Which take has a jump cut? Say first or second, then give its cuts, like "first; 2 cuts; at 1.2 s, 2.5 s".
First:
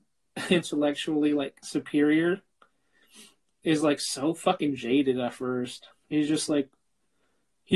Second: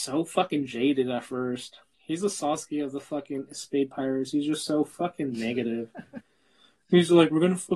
second; 1 cut; at 1.9 s